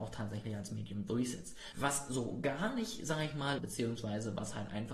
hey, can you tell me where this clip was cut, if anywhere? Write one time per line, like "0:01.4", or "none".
0:01.7
0:03.6